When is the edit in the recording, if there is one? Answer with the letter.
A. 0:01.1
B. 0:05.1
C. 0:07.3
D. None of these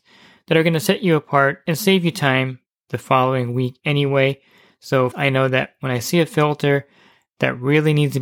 B